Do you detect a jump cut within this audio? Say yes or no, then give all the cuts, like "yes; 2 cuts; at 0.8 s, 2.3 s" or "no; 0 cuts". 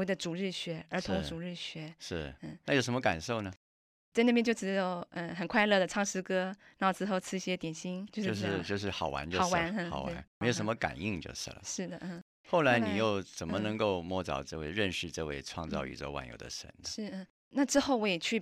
yes; 1 cut; at 8.1 s